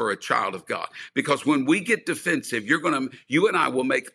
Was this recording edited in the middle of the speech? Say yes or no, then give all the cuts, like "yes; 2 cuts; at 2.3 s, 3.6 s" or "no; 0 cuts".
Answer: no; 0 cuts